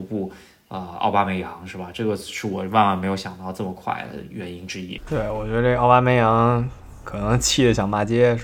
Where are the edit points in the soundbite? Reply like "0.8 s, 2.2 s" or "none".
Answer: none